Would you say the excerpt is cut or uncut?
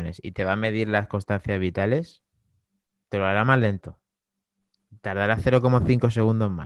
uncut